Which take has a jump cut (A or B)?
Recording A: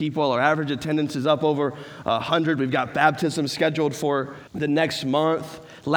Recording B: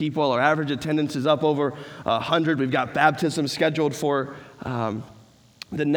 A